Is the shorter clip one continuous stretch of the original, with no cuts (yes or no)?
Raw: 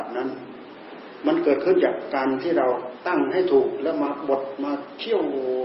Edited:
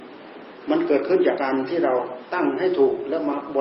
no